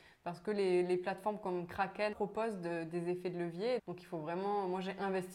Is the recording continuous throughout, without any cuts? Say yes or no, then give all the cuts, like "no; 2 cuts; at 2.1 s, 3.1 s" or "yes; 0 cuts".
no; 2 cuts; at 2.1 s, 3.8 s